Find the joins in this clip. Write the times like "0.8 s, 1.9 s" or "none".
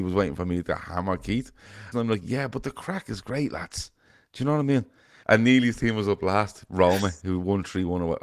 1.9 s, 5.2 s